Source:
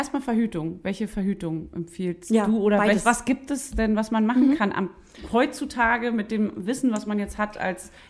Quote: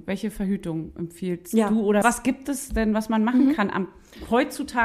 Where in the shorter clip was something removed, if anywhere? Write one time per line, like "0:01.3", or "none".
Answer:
0:02.0